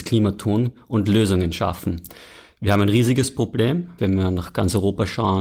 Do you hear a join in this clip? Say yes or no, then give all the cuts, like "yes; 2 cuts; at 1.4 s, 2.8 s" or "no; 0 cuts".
yes; 1 cut; at 4.0 s